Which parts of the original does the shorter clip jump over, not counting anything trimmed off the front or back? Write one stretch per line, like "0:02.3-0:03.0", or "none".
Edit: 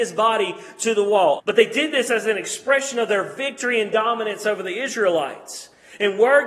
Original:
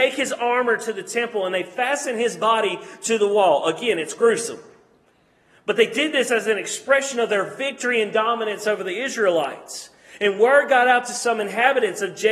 0:03.6-0:05.6